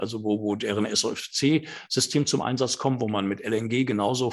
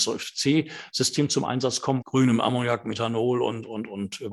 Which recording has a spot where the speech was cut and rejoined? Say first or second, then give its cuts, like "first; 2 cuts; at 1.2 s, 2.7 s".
second; 1 cut; at 2.0 s